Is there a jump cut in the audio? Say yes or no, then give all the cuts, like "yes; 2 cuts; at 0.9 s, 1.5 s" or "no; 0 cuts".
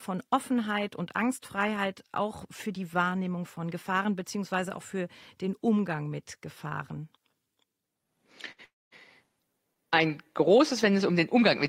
no; 0 cuts